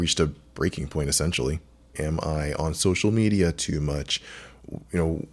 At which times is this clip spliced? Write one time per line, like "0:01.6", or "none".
0:01.9